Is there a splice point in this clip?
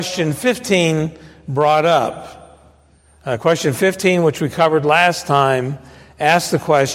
no; 0 cuts

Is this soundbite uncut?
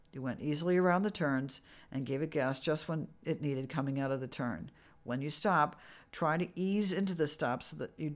yes; 0 cuts

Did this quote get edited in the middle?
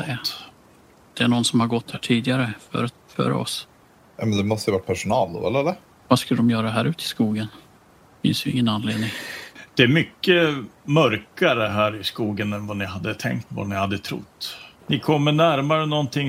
yes; 2 cuts; at 13.5 s, 14.8 s

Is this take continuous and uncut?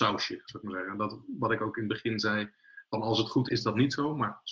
no; 1 cut; at 3.5 s

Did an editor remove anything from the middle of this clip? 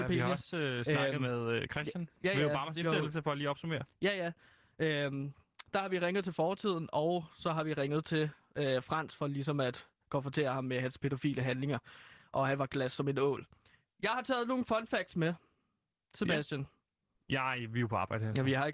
yes; 1 cut; at 17.2 s

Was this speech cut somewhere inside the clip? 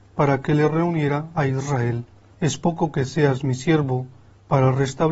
yes; 1 cut; at 2.3 s

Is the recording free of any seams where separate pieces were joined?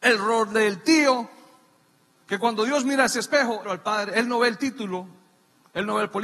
no; 2 cuts; at 2.2 s, 3.6 s

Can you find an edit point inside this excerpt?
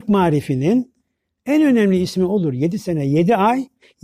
no; 0 cuts

